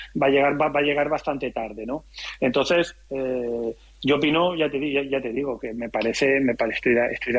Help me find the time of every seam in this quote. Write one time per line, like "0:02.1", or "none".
none